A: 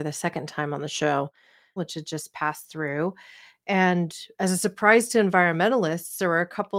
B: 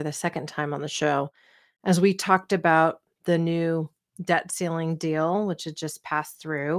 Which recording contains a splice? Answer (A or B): A